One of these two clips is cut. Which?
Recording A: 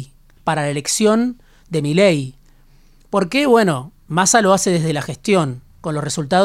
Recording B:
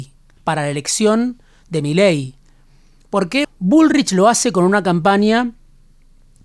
B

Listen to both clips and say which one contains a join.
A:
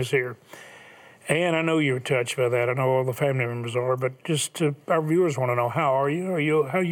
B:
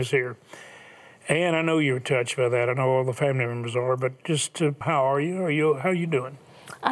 B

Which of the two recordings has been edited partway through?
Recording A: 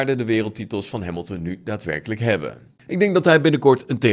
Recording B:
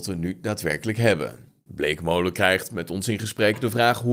A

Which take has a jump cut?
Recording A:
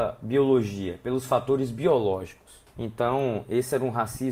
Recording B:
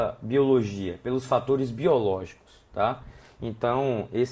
A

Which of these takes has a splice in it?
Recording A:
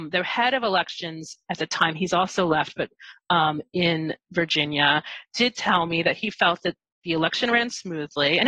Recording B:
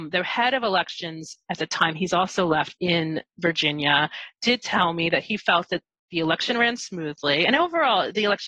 B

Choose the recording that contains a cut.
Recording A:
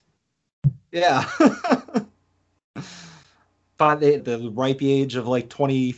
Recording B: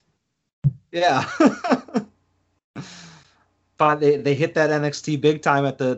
A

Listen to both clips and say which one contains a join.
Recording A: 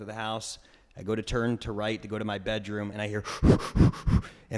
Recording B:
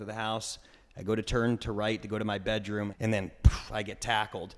B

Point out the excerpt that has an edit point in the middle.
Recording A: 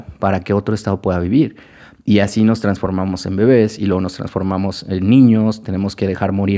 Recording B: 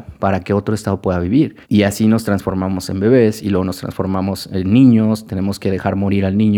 B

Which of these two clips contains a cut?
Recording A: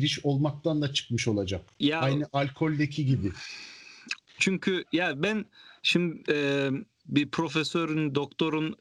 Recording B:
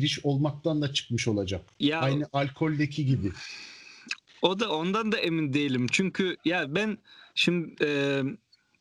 A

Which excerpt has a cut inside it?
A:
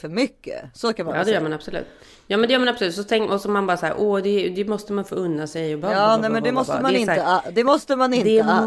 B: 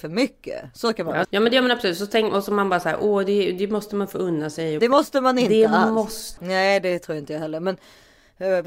B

